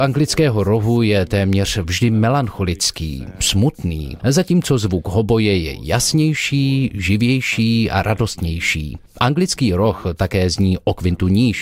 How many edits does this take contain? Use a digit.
2